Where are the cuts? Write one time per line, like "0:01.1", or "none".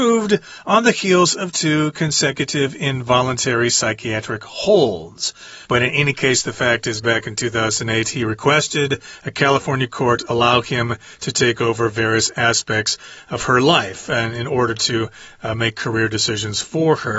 0:05.7